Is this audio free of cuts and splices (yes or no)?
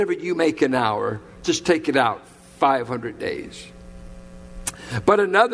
yes